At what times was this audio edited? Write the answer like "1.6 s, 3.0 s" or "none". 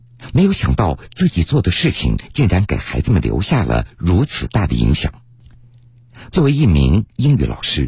6.3 s